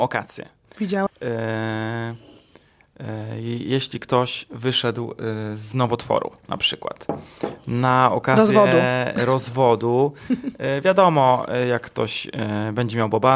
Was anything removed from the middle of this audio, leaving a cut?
yes; 1 cut; at 1.1 s

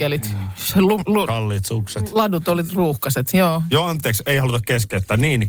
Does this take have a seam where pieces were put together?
yes; 1 cut; at 1.3 s

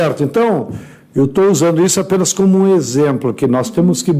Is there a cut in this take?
no; 0 cuts

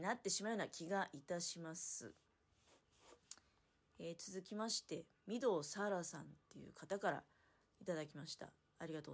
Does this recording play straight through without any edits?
yes; 0 cuts

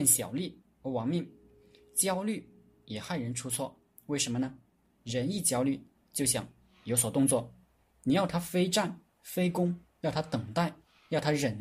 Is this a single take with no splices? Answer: yes; 0 cuts

